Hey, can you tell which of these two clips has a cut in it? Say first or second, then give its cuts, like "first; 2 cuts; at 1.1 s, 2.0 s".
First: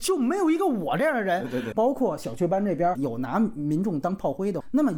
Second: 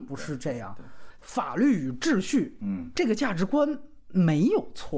first; 2 cuts; at 1.7 s, 2.9 s